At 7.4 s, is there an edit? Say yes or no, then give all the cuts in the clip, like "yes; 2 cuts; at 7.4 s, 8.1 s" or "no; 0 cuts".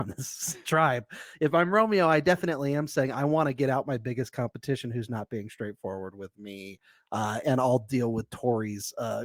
yes; 1 cut; at 7.4 s